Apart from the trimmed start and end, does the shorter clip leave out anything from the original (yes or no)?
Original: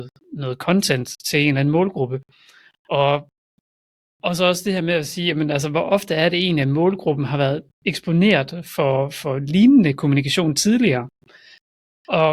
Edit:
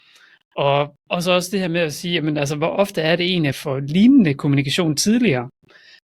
yes